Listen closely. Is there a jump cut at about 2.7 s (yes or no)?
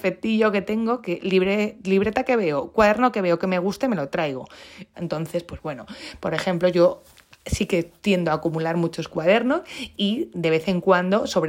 no